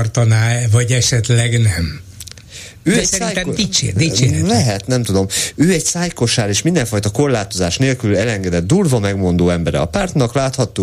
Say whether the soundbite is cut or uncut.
uncut